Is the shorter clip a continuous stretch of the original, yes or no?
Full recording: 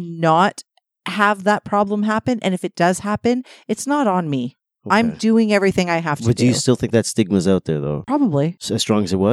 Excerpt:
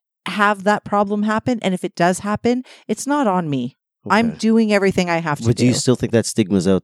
yes